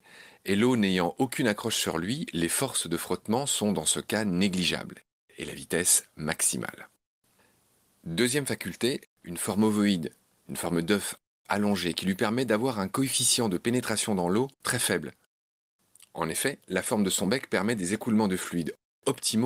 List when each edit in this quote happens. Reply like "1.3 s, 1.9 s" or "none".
9.0 s, 14.5 s